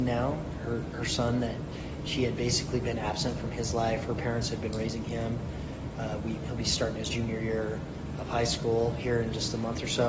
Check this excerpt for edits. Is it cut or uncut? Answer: cut